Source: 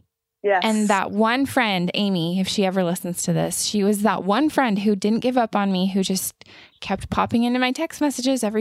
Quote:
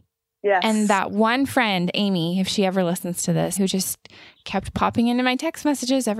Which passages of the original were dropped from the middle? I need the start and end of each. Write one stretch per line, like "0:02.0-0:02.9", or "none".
0:03.6-0:05.9